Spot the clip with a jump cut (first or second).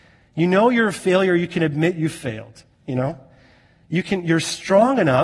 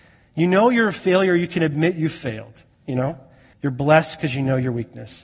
second